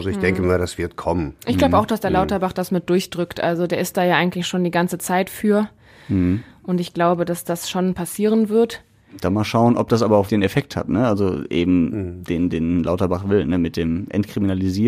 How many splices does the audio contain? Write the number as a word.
one